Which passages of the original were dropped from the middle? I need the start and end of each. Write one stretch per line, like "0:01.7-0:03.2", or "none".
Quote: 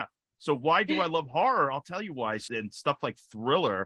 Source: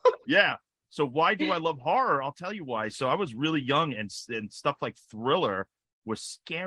0:03.0-0:04.3